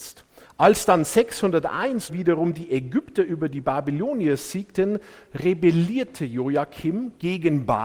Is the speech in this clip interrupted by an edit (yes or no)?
yes